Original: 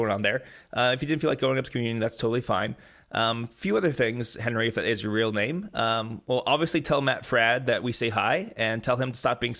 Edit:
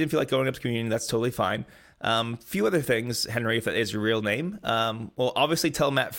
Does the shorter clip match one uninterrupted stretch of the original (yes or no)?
yes